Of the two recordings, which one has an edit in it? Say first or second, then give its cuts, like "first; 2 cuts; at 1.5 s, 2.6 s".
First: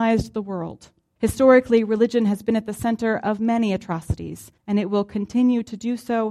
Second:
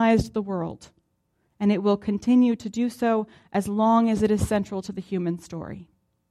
first; 2 cuts; at 1.2 s, 4.6 s